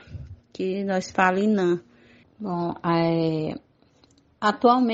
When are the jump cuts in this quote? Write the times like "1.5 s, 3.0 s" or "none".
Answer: 2.2 s